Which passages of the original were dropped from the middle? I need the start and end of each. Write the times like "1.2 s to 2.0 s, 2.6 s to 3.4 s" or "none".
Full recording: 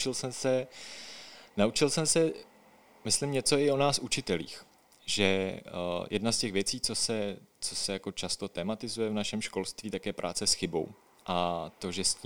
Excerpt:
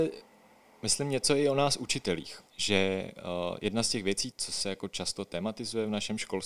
4.7 s to 5.0 s, 6.8 s to 7.6 s